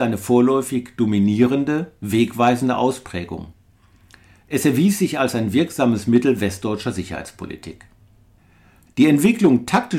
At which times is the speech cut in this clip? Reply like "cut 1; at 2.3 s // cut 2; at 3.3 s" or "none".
cut 1; at 8.9 s